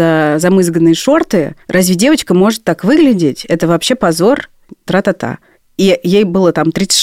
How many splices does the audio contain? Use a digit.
1